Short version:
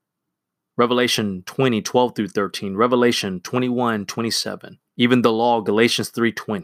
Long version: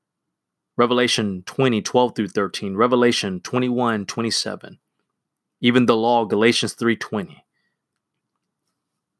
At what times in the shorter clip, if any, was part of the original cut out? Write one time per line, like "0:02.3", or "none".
0:04.9